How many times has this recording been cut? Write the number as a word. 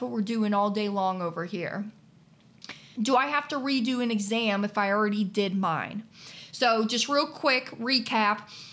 one